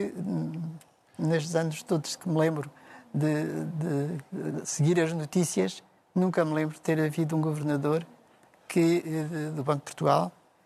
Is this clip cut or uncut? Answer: uncut